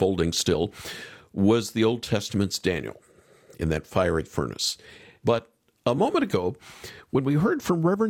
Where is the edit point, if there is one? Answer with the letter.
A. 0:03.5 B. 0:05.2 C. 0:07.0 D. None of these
B